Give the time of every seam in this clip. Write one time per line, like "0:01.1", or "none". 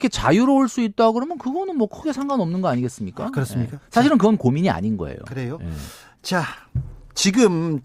none